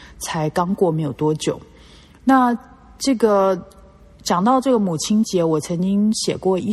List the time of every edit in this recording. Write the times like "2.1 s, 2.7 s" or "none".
none